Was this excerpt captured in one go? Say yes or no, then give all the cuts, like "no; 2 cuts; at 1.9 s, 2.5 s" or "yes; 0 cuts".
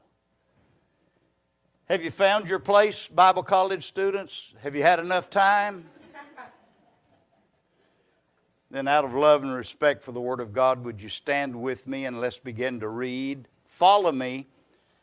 yes; 0 cuts